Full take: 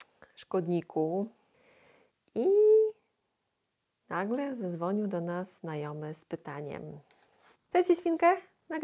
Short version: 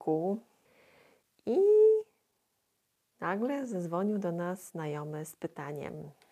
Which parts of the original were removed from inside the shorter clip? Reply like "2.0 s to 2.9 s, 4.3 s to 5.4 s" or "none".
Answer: none